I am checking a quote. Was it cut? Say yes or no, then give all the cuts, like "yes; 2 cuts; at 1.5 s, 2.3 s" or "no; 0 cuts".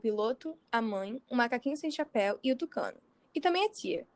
no; 0 cuts